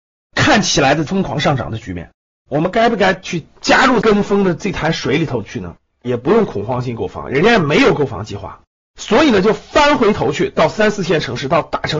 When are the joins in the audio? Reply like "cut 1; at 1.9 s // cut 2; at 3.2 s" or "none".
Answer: cut 1; at 2.5 s // cut 2; at 6.0 s // cut 3; at 8.9 s